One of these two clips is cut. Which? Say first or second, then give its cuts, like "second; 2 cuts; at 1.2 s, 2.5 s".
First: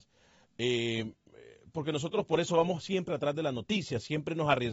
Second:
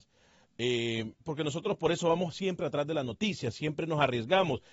second; 1 cut; at 1.2 s